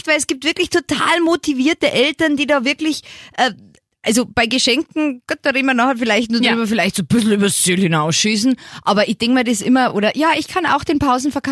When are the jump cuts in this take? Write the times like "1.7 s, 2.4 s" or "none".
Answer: none